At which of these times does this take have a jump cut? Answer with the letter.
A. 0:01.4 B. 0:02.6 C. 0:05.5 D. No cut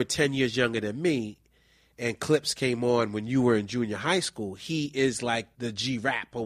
C